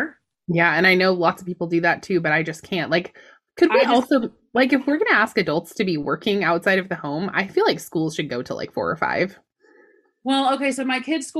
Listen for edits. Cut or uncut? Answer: uncut